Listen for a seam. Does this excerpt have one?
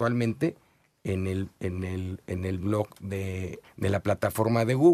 yes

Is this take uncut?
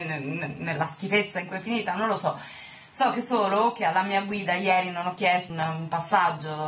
no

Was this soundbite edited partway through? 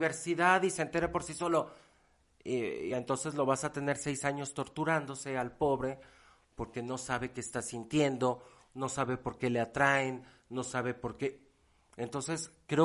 no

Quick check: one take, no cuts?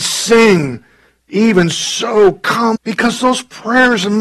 no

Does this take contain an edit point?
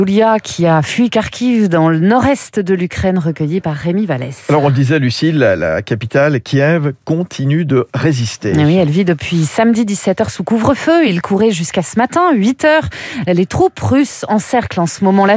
no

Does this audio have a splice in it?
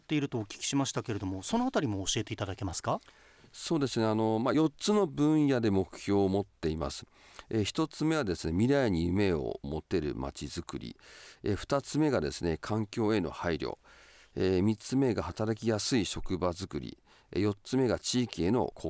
no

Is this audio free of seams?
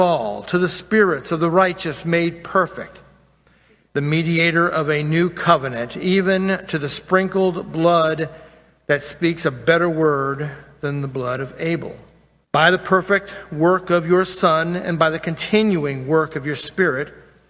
no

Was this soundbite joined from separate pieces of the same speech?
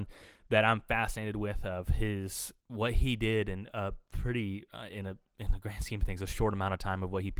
yes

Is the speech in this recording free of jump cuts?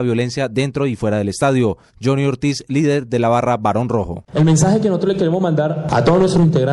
yes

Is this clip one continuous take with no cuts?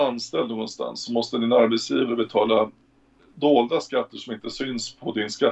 yes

